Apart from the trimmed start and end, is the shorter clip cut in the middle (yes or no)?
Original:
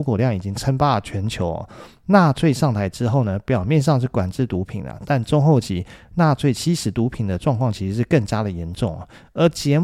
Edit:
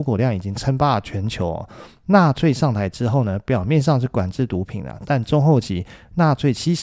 no